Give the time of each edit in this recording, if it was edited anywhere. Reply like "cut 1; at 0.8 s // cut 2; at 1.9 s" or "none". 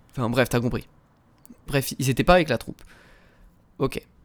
cut 1; at 1.7 s